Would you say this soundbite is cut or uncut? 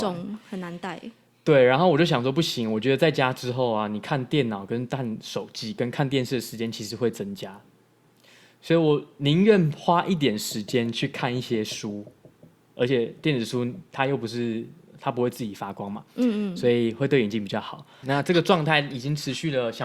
cut